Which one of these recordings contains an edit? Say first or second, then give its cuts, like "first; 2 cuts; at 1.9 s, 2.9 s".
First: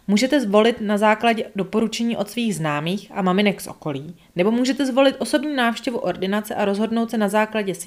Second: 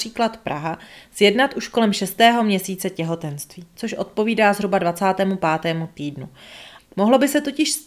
second; 1 cut; at 6.8 s